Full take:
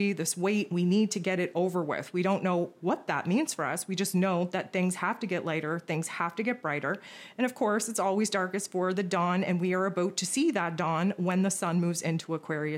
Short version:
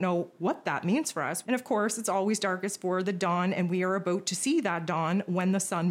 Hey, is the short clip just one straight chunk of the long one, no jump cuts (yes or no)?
no